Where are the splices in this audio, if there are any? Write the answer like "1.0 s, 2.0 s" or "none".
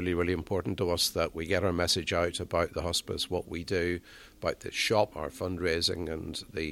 5.1 s